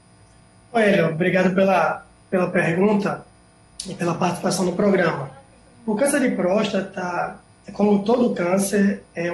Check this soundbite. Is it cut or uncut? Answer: uncut